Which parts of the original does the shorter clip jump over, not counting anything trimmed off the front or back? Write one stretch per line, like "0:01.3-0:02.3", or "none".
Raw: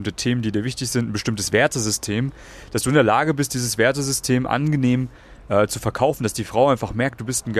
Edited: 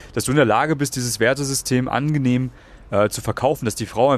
none

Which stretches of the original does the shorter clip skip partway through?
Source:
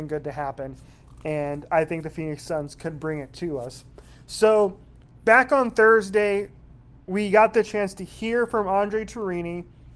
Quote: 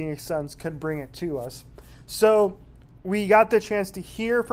0:05.2-0:07.0

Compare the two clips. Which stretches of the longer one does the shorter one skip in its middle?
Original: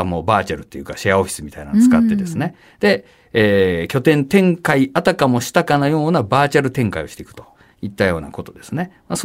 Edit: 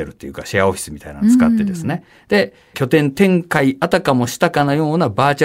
0:03.3-0:03.9

